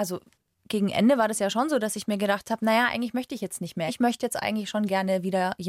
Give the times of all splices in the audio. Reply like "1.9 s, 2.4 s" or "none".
3.9 s

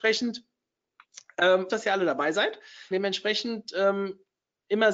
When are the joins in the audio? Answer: 1.7 s, 2.9 s

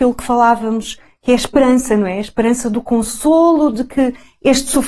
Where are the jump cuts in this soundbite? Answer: none

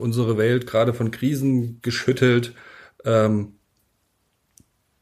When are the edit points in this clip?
none

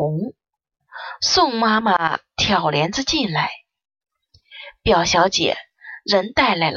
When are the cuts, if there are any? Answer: none

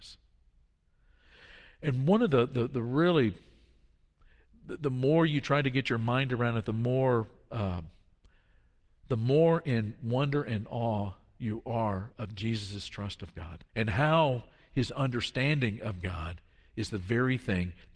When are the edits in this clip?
12.1 s, 13.7 s

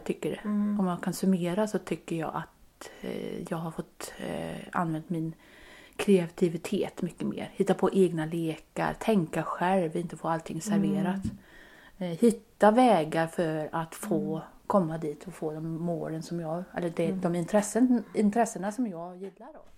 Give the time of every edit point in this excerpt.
none

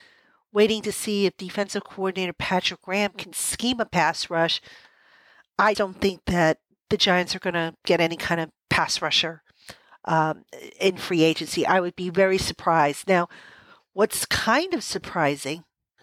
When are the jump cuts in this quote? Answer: 5.7 s

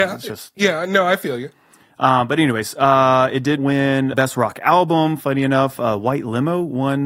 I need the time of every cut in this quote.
4.1 s

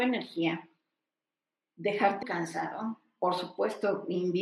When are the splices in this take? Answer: 2.2 s

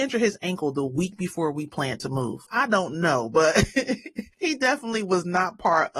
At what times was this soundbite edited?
2.5 s

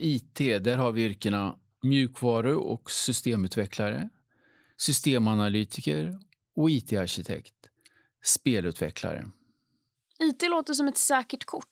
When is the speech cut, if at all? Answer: none

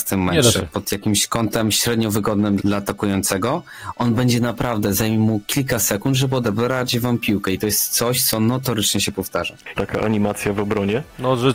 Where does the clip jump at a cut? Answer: 2.6 s, 9.7 s

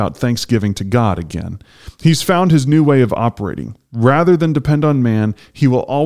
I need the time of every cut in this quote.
none

